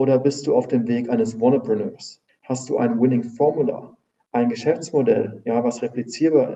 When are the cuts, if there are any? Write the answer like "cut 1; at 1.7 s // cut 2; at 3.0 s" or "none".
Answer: cut 1; at 2.3 s